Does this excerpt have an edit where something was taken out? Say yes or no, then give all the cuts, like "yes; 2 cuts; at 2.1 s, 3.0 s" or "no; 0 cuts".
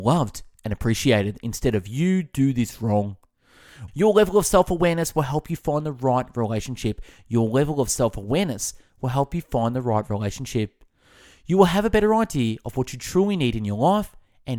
yes; 1 cut; at 3.9 s